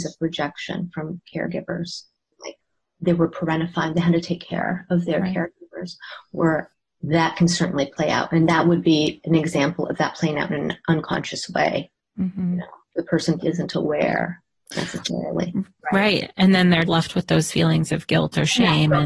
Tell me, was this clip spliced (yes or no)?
yes